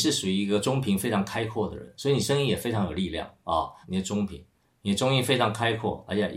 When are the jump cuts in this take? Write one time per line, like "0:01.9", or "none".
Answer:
0:03.8